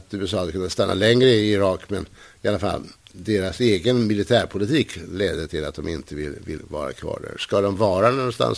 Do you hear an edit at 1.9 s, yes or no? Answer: no